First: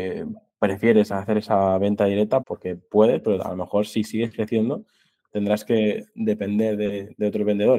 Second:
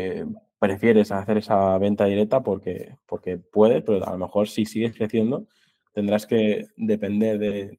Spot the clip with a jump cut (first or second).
first